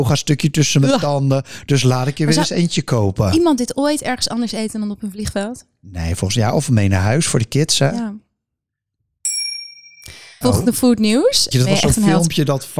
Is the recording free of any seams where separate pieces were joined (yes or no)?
no